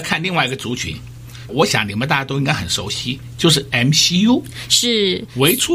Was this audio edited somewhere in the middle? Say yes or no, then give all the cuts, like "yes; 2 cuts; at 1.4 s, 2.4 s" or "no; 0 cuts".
yes; 1 cut; at 1.5 s